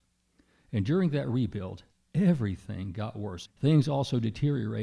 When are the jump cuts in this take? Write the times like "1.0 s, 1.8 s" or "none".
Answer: 3.4 s